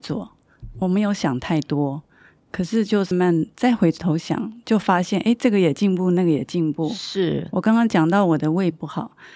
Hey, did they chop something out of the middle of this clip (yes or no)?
yes